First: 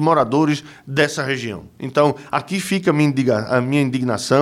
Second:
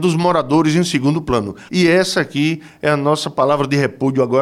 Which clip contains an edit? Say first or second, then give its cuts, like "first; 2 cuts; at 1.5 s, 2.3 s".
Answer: second; 1 cut; at 1.7 s